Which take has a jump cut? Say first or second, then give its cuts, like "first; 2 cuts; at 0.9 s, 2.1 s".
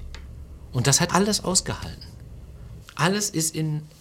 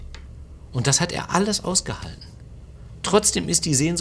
first; 2 cuts; at 1.1 s, 2.8 s